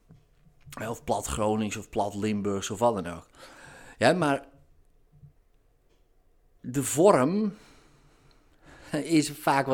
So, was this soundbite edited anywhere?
no; 0 cuts

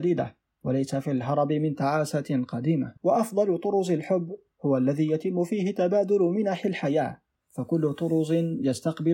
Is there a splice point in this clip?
yes; 1 cut; at 3.0 s

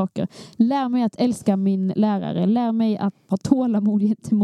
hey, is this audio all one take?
no; 1 cut; at 3.3 s

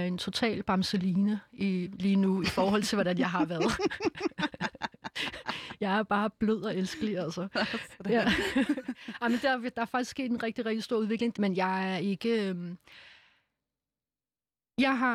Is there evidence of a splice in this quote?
yes; 1 cut; at 11.3 s

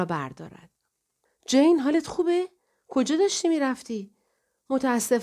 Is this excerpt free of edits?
no; 1 cut; at 1.3 s

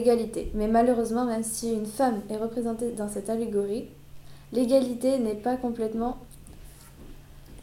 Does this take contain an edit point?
no; 0 cuts

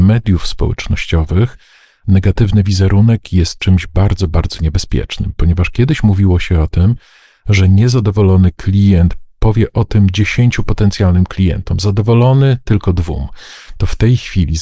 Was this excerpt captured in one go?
yes; 0 cuts

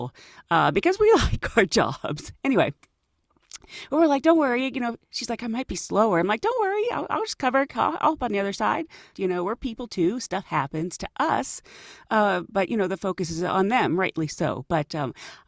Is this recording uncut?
no; 1 cut; at 9.1 s

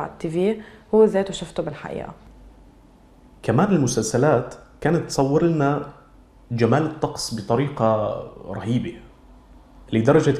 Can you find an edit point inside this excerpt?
no; 0 cuts

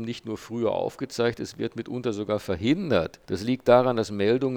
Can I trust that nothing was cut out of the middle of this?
no; 1 cut; at 3.2 s

